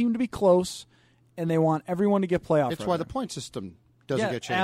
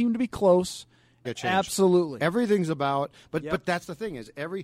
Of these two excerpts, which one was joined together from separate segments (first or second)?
second